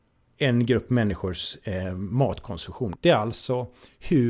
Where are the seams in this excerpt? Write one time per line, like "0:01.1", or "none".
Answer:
0:02.9